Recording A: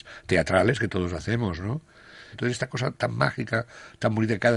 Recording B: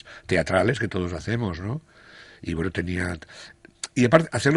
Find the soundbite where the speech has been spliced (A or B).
A